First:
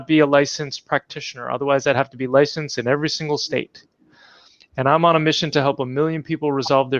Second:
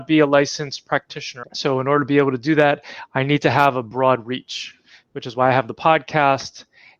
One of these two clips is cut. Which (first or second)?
second